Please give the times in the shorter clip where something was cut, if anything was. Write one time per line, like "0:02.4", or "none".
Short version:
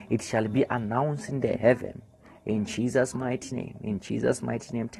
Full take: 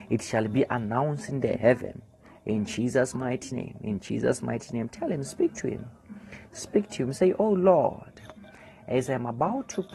none